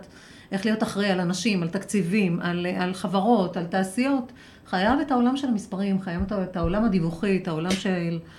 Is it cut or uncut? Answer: uncut